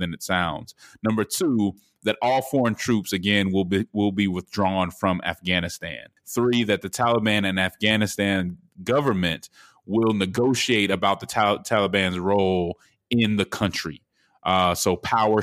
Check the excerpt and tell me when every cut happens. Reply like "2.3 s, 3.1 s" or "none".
6.2 s